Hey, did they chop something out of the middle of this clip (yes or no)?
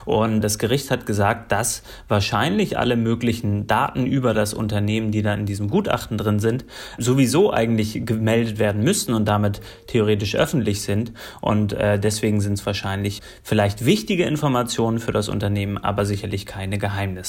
no